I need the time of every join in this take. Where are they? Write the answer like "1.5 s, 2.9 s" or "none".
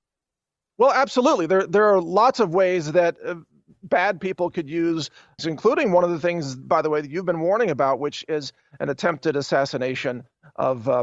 5.4 s